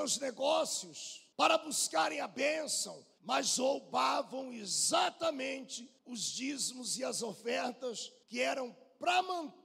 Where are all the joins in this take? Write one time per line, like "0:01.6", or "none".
0:03.2